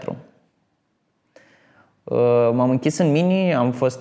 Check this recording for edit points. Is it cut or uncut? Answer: uncut